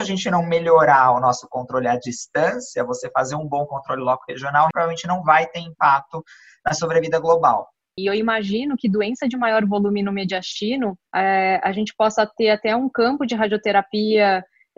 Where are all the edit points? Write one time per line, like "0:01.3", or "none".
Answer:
0:04.7
0:08.0
0:11.1